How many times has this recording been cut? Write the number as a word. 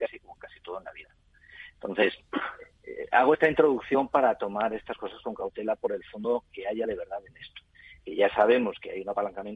zero